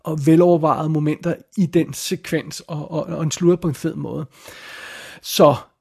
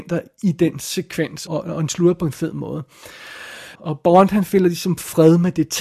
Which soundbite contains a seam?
second; 2 cuts; at 1.5 s, 3.7 s

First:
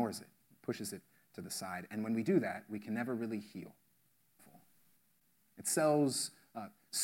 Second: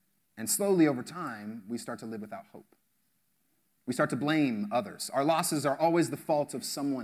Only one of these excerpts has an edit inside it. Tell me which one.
first; 1 cut; at 4.4 s

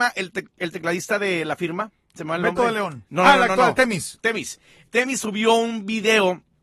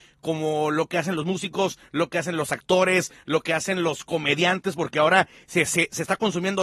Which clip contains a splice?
first; 1 cut; at 3.1 s

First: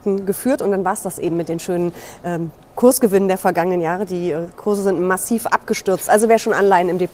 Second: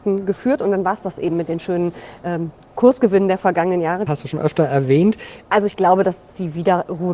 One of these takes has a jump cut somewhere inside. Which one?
second; 2 cuts; at 4.1 s, 5.4 s

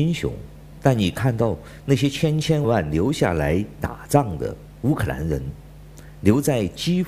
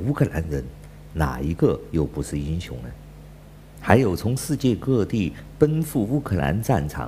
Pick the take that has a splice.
first; 1 cut; at 2.6 s

